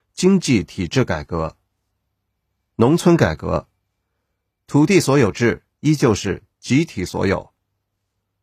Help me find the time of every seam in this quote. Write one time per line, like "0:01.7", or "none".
none